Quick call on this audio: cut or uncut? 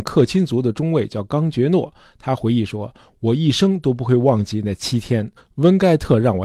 cut